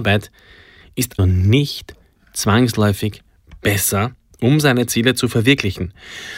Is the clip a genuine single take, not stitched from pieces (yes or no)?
no